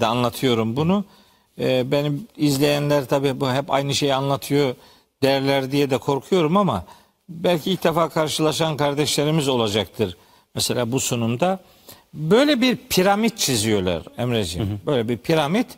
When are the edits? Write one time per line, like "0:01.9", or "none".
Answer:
none